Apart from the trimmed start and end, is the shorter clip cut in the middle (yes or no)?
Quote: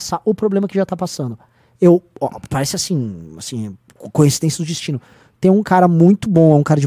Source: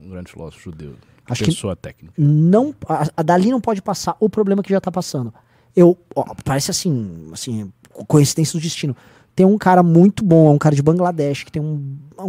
no